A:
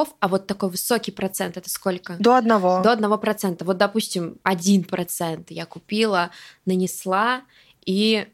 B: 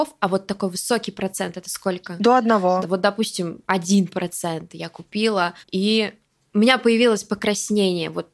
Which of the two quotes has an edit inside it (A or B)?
B